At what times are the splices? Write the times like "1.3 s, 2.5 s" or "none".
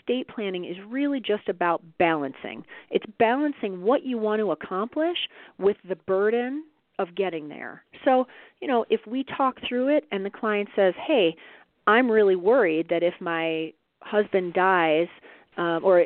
none

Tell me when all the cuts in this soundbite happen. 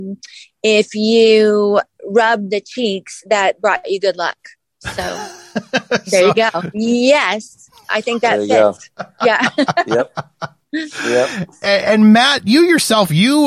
6.7 s

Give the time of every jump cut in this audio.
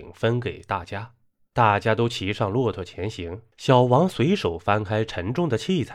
3.5 s

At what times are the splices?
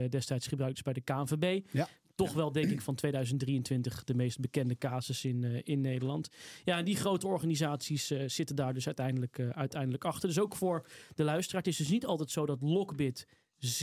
none

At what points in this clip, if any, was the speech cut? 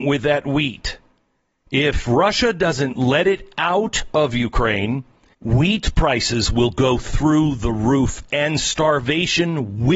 5.3 s

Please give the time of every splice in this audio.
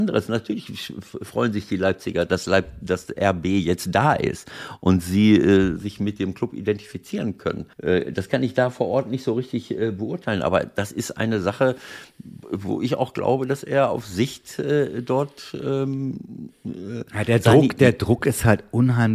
7.7 s

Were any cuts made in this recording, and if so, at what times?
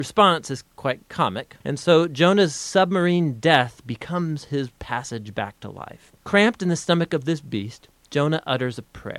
1.6 s

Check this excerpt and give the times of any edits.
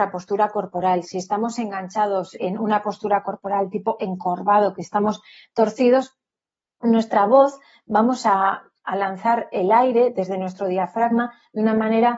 2.4 s

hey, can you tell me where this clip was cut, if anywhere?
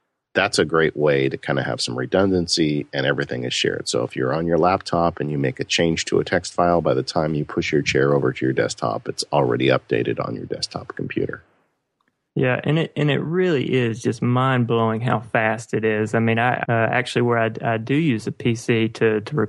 16.6 s

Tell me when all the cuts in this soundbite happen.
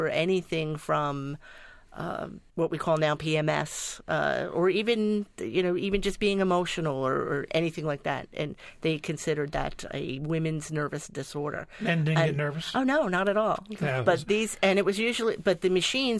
2.5 s

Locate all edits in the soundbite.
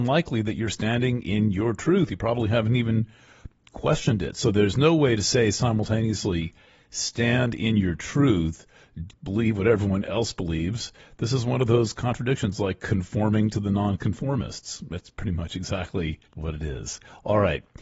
9.1 s, 16.2 s

